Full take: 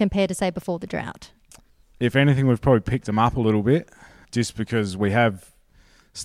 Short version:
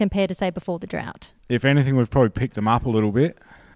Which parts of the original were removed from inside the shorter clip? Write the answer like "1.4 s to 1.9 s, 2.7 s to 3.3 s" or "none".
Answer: 1.4 s to 1.9 s